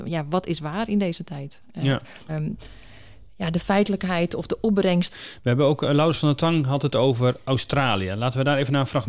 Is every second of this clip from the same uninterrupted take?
no; 2 cuts; at 2.3 s, 5.1 s

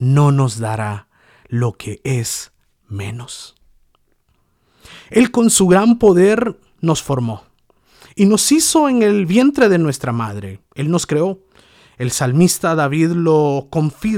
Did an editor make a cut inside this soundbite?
no; 0 cuts

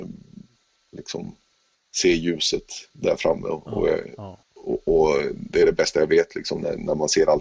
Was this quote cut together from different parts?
yes; 1 cut; at 4.4 s

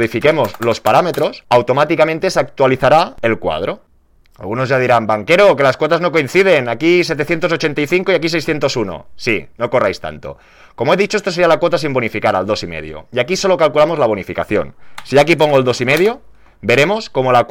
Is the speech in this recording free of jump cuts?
yes; 0 cuts

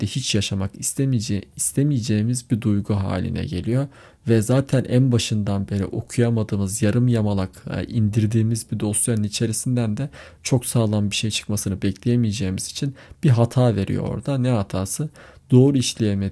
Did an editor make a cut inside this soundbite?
no; 0 cuts

